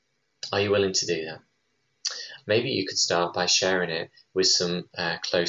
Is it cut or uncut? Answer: cut